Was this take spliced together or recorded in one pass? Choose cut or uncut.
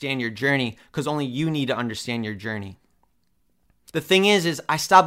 cut